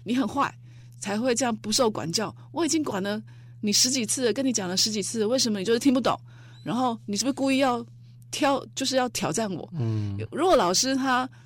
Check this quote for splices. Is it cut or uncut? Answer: uncut